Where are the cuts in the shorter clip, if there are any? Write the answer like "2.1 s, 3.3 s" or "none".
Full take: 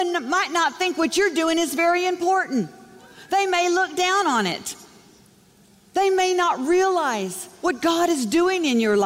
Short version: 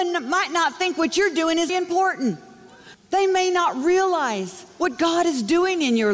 1.7 s, 2.9 s